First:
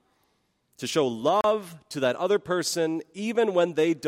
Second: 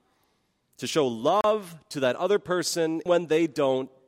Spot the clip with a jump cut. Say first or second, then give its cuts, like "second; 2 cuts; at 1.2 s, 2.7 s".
second; 1 cut; at 3.1 s